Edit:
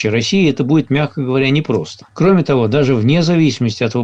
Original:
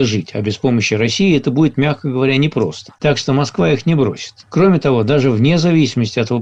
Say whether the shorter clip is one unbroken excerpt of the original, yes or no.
no